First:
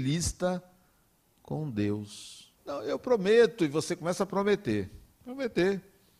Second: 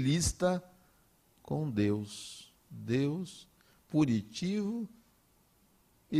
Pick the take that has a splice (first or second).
first